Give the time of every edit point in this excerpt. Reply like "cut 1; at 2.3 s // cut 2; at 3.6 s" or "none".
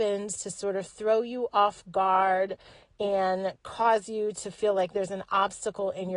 none